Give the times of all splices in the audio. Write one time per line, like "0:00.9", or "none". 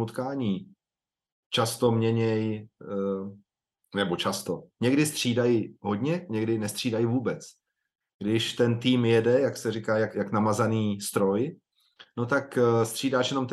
0:10.1